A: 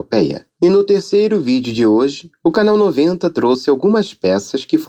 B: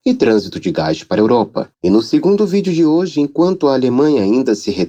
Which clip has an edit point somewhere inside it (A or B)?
B